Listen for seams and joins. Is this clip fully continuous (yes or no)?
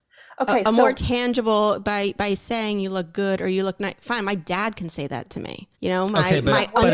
no